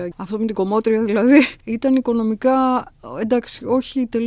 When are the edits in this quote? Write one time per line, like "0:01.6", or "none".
0:01.6